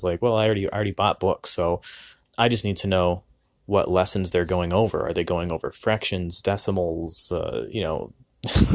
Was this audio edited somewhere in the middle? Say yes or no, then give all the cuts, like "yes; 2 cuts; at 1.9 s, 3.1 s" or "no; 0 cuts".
yes; 1 cut; at 2.2 s